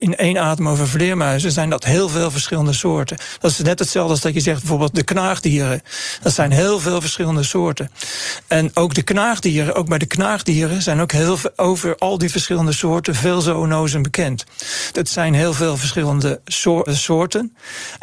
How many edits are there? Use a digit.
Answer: 2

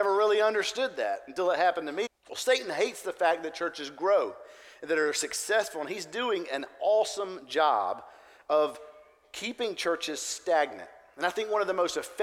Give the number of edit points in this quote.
1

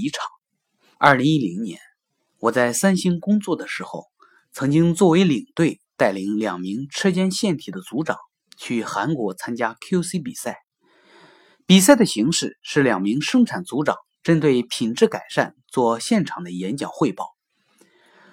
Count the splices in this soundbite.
1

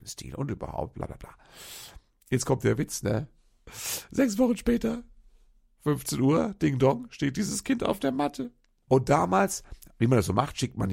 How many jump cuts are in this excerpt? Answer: 1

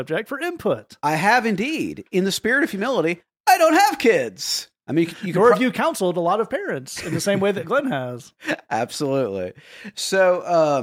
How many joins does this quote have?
0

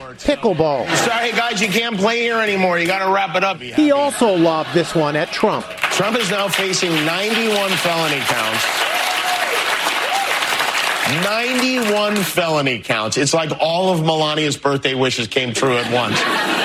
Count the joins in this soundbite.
0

